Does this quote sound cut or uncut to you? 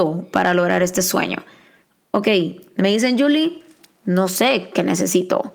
uncut